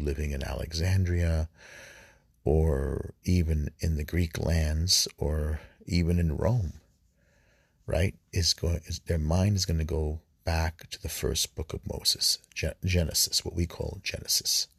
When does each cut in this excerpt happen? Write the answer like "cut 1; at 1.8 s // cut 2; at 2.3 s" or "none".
none